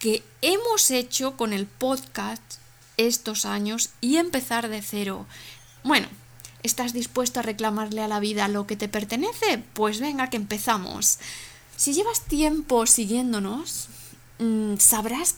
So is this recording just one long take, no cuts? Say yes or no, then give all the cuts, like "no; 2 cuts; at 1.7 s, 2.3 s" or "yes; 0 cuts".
no; 1 cut; at 5.8 s